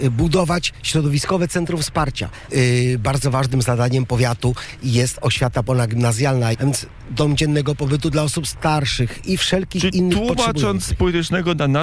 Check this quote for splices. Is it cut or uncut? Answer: cut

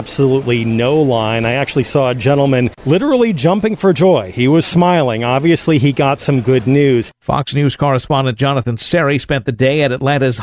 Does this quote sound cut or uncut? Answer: uncut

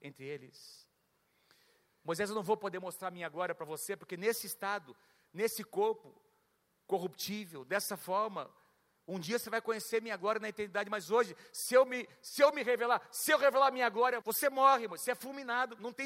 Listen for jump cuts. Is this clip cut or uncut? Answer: cut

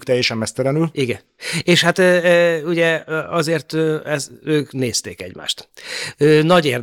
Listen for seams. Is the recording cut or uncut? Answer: uncut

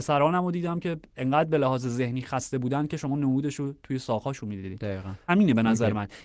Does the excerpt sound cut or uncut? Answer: cut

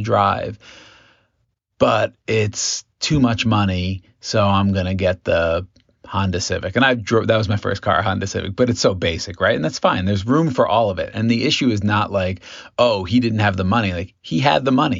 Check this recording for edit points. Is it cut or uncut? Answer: uncut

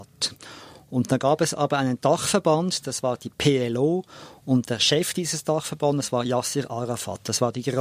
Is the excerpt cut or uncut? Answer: uncut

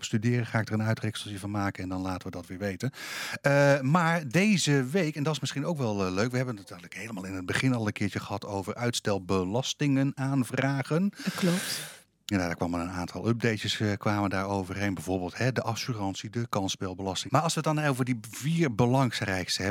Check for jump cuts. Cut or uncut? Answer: cut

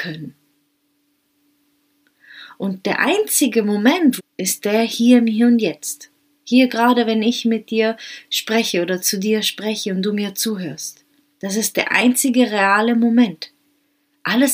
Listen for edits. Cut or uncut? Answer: cut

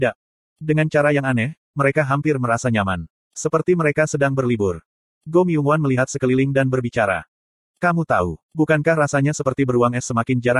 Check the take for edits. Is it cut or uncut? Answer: uncut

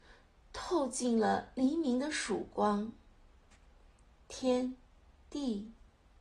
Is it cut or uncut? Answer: uncut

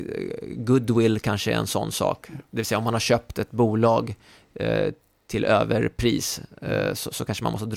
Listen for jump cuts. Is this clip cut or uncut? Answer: uncut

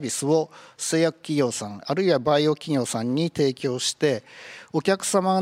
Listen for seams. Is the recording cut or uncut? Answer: uncut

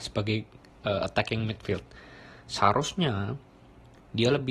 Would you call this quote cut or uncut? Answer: uncut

